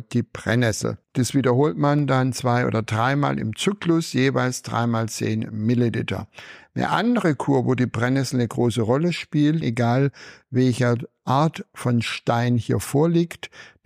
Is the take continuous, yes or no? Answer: no